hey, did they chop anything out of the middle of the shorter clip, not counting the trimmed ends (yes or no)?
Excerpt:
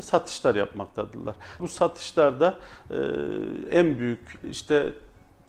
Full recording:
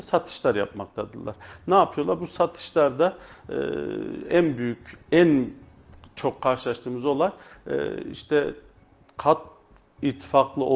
yes